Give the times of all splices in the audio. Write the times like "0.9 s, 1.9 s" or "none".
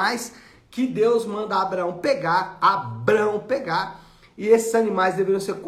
none